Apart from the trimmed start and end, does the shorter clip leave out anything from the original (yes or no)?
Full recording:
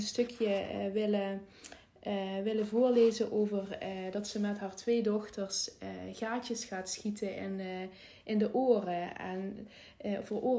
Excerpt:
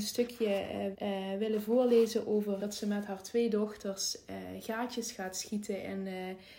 yes